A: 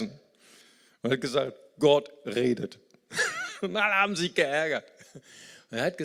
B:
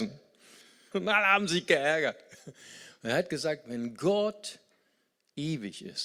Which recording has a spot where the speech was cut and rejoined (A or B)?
B